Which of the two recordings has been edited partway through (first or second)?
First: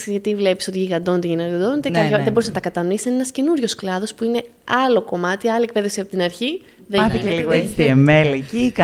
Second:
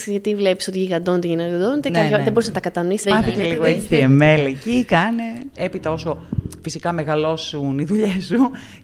second